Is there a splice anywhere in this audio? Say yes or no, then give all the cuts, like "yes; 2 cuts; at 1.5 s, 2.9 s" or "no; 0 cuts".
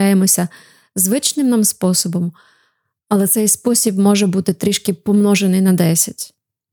no; 0 cuts